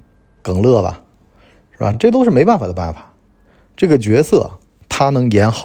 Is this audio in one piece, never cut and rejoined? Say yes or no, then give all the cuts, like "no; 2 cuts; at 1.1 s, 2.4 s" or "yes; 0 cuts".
yes; 0 cuts